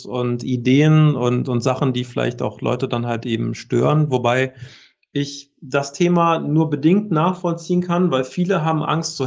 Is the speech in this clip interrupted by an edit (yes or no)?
no